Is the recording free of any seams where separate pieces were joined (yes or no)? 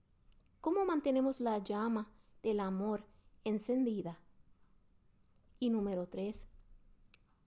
no